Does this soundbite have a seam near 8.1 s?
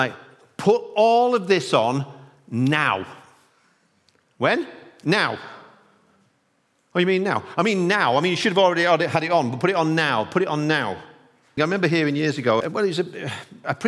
no; 2 cuts; at 11.6 s, 12.6 s

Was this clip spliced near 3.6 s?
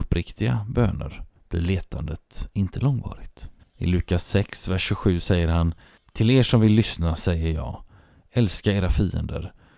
yes; 1 cut; at 3.6 s

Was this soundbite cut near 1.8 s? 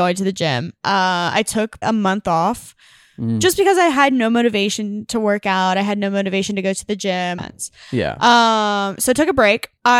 yes; 2 cuts; at 1.8 s, 7.4 s

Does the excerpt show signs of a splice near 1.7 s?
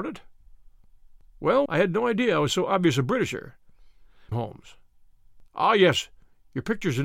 yes; 3 cuts; at 1.7 s, 4.3 s, 5.5 s

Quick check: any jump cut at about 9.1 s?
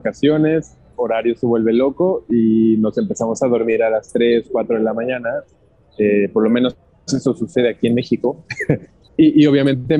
yes; 2 cuts; at 0.9 s, 9.1 s

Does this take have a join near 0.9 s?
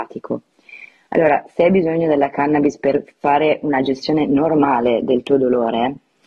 no; 0 cuts

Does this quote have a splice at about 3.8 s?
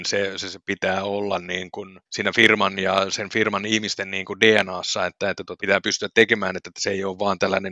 no; 2 cuts; at 2.1 s, 5.6 s

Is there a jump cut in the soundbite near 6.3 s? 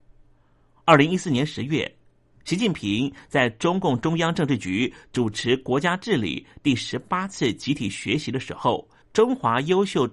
no; 1 cut; at 9.0 s

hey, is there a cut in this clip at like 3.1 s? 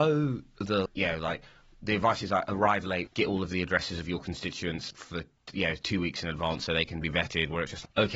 yes; 2 cuts; at 3.1 s, 4.9 s

